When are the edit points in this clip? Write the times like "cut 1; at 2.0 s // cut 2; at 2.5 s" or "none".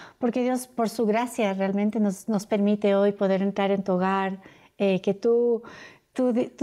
none